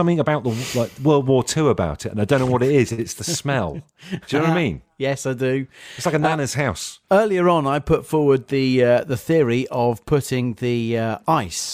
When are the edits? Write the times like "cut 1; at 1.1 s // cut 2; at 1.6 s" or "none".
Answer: none